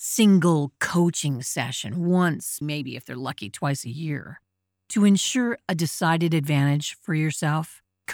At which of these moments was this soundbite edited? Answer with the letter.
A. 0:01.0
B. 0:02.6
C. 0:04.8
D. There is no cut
B